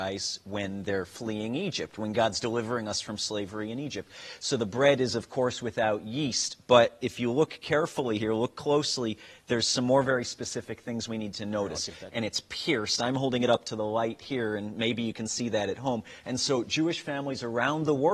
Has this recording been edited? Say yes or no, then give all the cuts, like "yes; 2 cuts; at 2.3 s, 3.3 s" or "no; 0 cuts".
yes; 2 cuts; at 12.1 s, 16.2 s